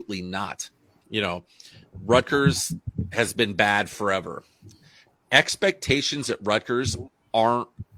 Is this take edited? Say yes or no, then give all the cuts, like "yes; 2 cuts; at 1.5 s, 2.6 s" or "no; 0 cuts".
yes; 1 cut; at 1.0 s